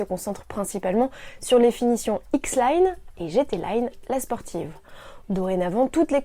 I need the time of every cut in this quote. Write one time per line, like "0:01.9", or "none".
0:03.1
0:05.2